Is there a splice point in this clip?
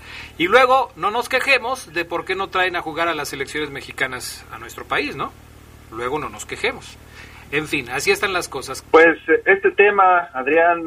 yes; 1 cut; at 8.8 s

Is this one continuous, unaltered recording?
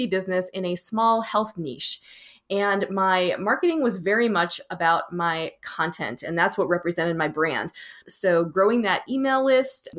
no; 1 cut; at 8.0 s

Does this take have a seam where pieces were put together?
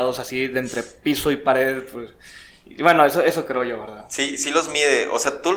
no; 0 cuts

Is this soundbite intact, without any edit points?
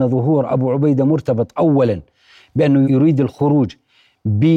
no; 1 cut; at 2.8 s

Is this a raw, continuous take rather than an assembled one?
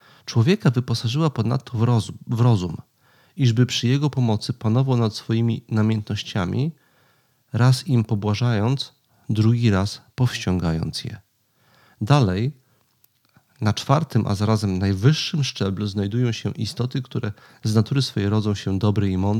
yes; 0 cuts

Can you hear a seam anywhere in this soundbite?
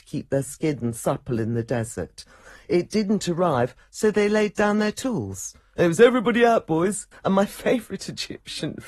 yes; 1 cut; at 7.1 s

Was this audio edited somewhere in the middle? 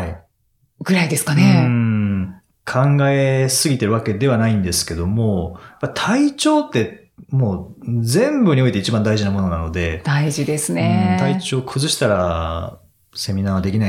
yes; 1 cut; at 2.5 s

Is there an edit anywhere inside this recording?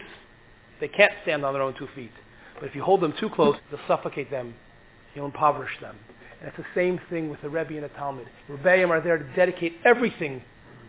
yes; 2 cuts; at 3.6 s, 8.4 s

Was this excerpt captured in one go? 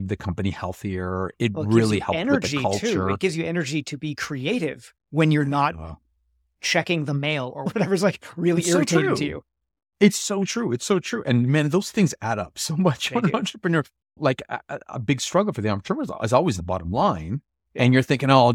yes; 0 cuts

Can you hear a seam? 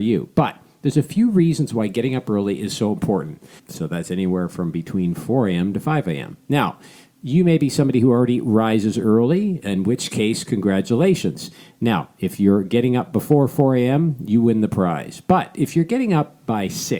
yes; 1 cut; at 3.6 s

